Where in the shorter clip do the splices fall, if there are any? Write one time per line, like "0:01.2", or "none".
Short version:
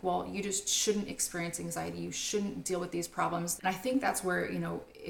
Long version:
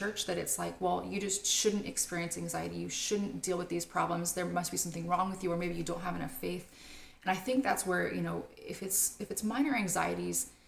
0:03.6